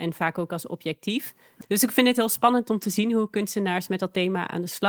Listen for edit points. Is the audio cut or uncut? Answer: cut